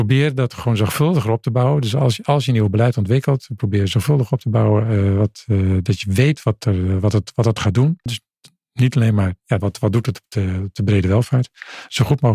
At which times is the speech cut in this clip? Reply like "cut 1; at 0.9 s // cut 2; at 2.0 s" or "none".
cut 1; at 8.1 s // cut 2; at 9.6 s